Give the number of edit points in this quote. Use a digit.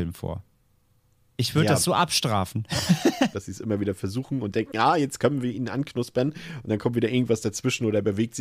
1